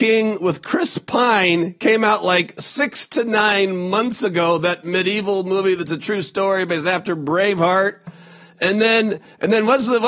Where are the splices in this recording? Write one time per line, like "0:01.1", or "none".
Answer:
none